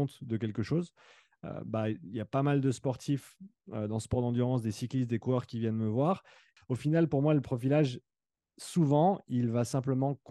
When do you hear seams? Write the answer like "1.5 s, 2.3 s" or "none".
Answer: 6.6 s